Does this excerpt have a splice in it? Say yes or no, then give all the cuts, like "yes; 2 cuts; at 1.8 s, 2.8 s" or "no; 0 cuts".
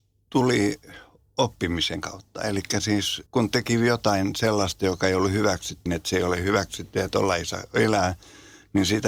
yes; 2 cuts; at 3.3 s, 5.9 s